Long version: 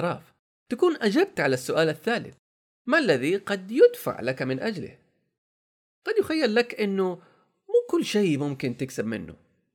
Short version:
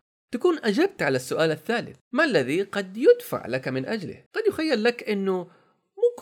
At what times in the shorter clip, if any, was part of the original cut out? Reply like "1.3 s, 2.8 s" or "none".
2.0 s, 4.3 s